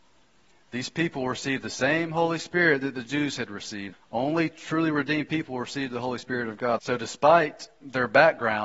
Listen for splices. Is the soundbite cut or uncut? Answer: cut